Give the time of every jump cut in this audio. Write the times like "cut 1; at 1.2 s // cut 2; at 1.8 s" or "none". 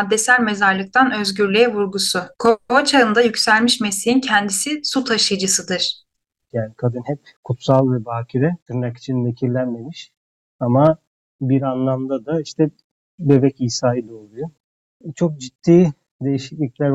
cut 1; at 2.3 s // cut 2; at 6.5 s